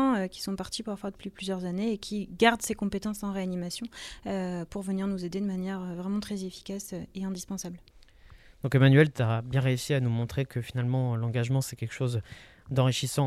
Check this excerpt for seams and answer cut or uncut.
uncut